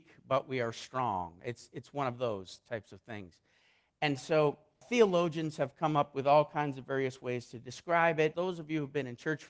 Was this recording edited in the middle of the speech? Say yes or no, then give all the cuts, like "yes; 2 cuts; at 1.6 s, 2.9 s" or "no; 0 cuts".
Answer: yes; 2 cuts; at 4.8 s, 8.3 s